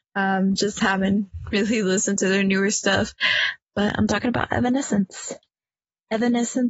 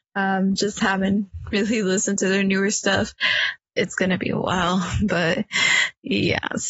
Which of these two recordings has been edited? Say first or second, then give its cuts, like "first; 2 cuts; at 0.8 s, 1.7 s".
second; 1 cut; at 3.6 s